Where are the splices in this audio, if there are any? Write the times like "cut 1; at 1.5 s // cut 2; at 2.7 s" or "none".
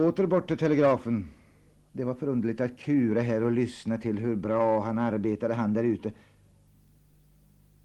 cut 1; at 1.9 s